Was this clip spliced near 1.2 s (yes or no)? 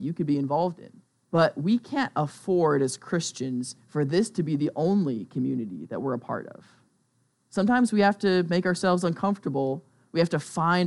yes